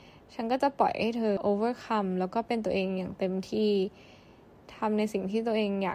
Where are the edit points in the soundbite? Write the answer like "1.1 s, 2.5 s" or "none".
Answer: 1.4 s